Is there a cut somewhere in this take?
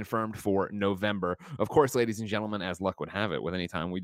no; 0 cuts

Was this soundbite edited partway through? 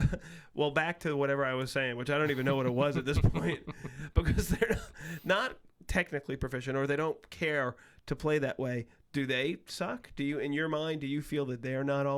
no; 0 cuts

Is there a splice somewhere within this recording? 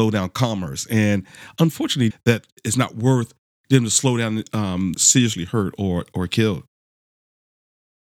yes; 2 cuts; at 2.1 s, 4.9 s

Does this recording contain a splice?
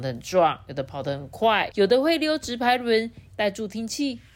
yes; 2 cuts; at 1.7 s, 3.3 s

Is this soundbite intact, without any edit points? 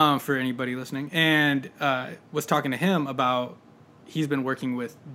yes; 0 cuts

